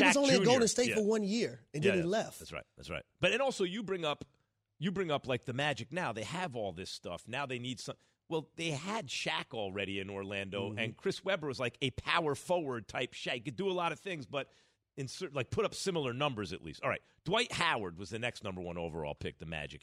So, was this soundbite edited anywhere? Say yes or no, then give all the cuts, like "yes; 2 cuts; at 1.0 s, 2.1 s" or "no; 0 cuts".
no; 0 cuts